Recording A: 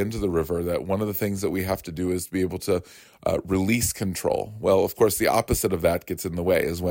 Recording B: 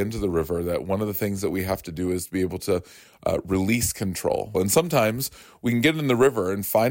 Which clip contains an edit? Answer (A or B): B